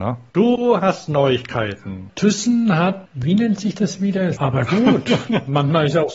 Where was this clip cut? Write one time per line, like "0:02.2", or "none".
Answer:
0:02.1
0:04.4